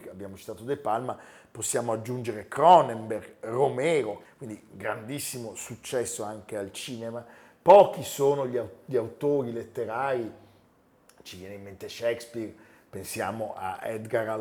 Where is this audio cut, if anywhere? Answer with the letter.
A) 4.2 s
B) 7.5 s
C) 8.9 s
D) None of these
A